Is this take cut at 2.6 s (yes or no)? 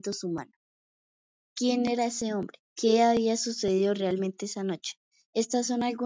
yes